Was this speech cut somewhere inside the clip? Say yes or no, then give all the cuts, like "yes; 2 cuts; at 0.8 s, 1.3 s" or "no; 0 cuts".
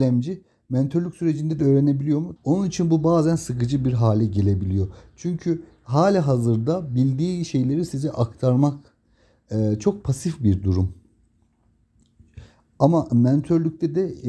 yes; 1 cut; at 2.4 s